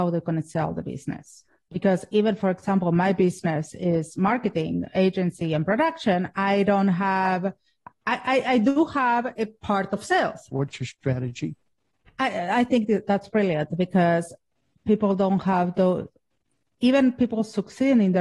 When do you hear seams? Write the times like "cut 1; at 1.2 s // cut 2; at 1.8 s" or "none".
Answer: cut 1; at 10.5 s

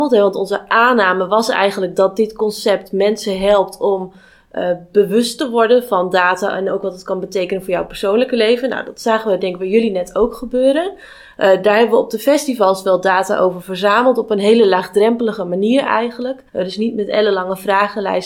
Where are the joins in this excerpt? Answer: cut 1; at 16.5 s

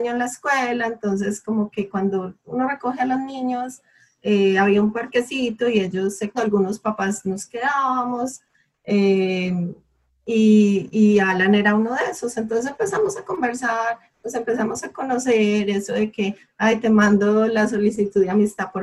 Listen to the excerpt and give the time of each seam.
cut 1; at 6.3 s

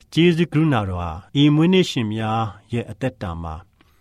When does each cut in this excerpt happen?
cut 1; at 1.3 s

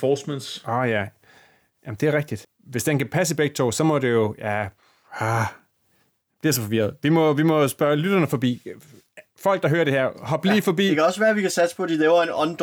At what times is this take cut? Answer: cut 1; at 2.4 s

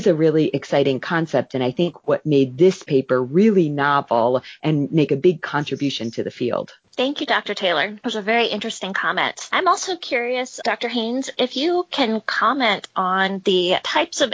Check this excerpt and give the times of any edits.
none

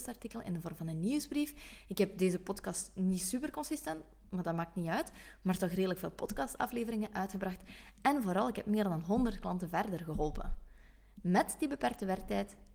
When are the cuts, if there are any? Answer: none

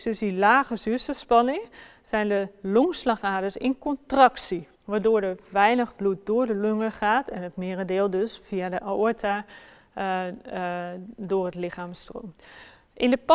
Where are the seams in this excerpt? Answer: cut 1; at 4.7 s

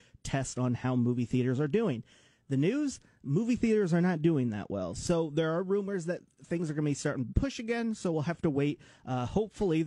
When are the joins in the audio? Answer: none

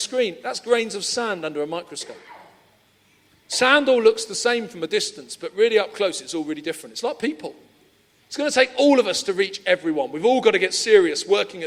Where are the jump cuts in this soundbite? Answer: none

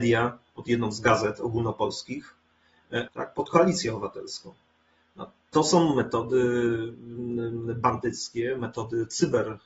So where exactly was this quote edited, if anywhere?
cut 1; at 3.1 s

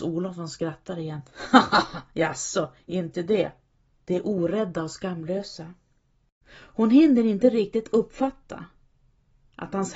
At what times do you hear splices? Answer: cut 1; at 3.9 s // cut 2; at 6.4 s

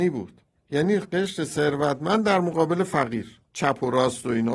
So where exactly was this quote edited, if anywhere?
cut 1; at 3.5 s

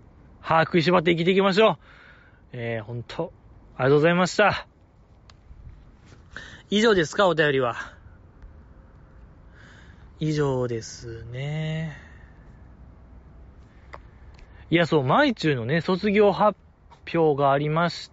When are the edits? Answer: none

